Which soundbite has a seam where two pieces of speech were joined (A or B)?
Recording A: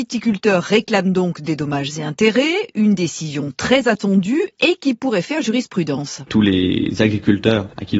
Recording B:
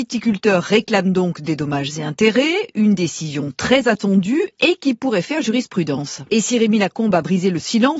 B